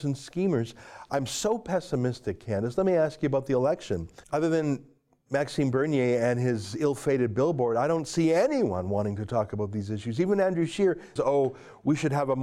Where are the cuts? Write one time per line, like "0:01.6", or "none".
0:04.2
0:11.2